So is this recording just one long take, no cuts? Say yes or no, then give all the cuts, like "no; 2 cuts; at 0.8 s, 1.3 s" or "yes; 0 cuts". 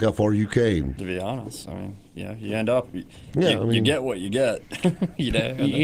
no; 1 cut; at 1.0 s